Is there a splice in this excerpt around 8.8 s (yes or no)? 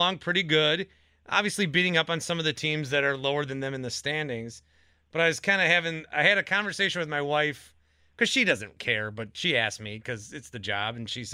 yes